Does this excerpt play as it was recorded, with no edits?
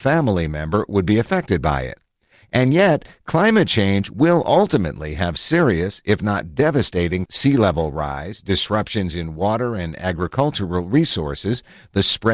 no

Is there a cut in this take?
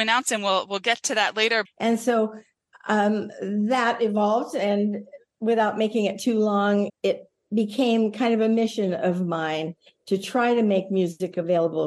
yes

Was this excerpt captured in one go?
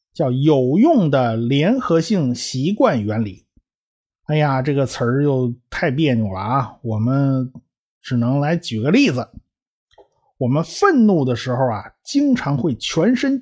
yes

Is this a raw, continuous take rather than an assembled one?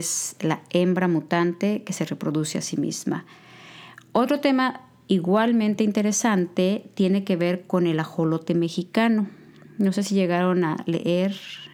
yes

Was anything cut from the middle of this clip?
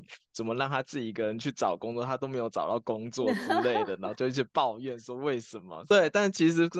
yes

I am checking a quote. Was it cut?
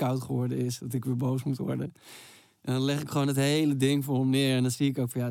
no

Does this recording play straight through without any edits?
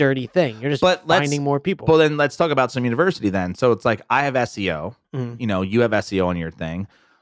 no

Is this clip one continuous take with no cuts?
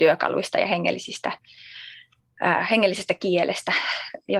yes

